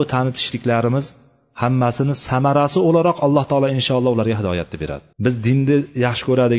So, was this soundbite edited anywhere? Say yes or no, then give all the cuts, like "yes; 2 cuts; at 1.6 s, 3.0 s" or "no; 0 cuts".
yes; 1 cut; at 5.1 s